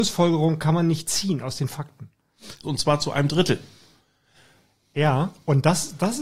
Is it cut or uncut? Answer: cut